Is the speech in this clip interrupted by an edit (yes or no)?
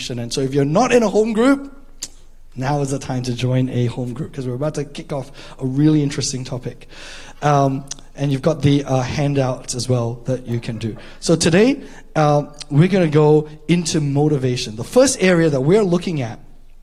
no